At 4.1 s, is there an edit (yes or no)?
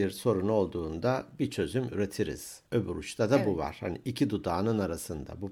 no